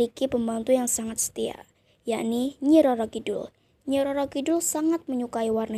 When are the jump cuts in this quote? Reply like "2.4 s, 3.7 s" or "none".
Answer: none